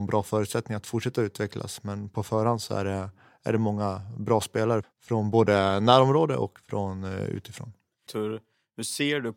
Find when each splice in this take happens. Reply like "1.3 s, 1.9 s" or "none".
4.8 s, 8.1 s